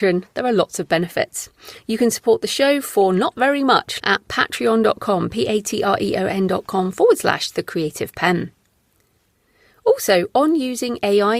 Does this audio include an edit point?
yes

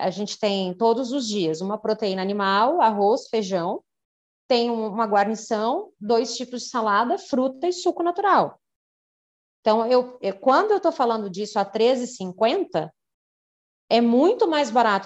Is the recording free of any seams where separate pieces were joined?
yes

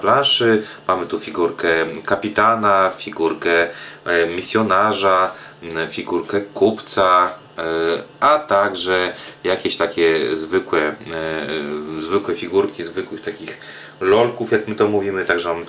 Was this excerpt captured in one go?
yes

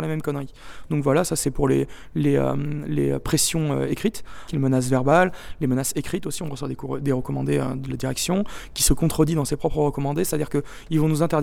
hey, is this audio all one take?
no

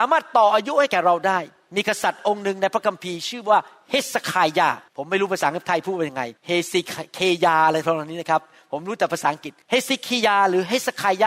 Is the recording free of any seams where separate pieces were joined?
no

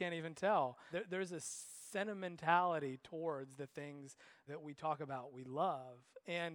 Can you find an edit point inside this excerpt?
yes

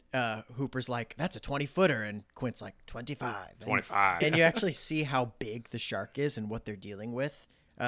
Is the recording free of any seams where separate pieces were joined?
no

